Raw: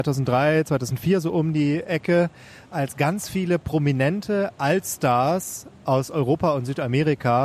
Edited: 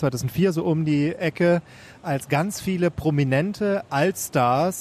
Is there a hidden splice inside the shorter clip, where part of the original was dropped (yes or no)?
no